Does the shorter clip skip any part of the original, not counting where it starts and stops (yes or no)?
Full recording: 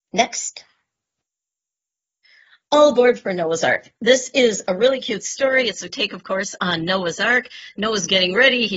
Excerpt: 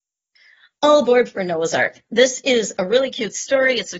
no